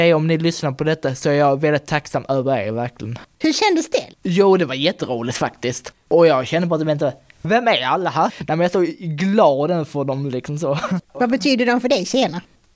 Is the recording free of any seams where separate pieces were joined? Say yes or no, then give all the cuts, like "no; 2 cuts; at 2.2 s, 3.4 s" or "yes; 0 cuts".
no; 3 cuts; at 3.4 s, 8.3 s, 11.0 s